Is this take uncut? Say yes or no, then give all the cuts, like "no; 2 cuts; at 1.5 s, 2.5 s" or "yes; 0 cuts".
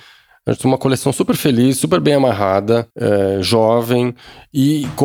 no; 1 cut; at 2.9 s